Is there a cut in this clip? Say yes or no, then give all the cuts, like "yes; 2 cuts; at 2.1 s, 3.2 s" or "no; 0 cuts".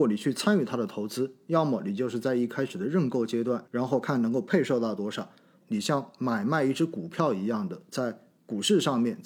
yes; 2 cuts; at 3.6 s, 5.6 s